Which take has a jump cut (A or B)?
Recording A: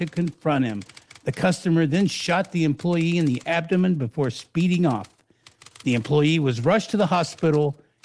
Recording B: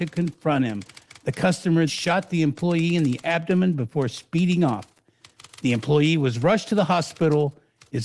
B